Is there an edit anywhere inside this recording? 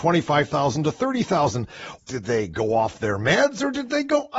yes; 1 cut; at 2.0 s

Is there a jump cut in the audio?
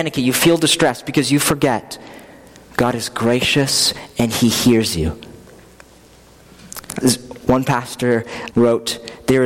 yes; 2 cuts; at 7.0 s, 8.5 s

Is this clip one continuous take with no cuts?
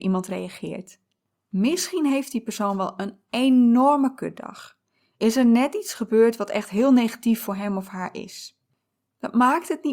yes; 0 cuts

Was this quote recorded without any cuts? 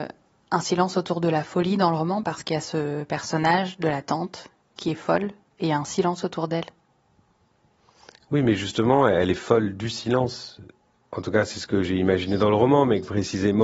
yes; 0 cuts

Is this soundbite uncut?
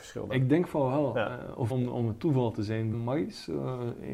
no; 2 cuts; at 1.7 s, 2.9 s

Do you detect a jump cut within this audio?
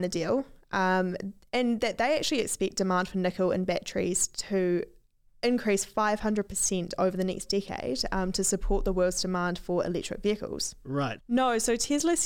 yes; 1 cut; at 11.2 s

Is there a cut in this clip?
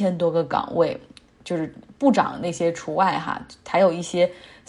no; 0 cuts

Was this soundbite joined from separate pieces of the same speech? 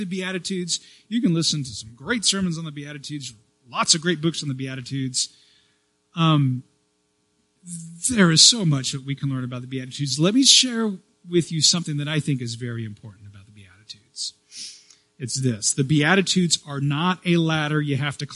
no; 0 cuts

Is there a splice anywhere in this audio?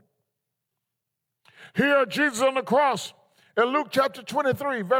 no; 0 cuts

